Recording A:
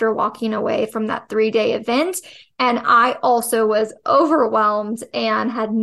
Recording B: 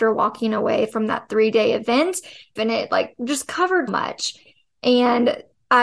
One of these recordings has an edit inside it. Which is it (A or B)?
B